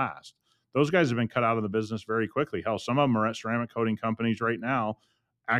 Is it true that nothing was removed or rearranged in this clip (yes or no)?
yes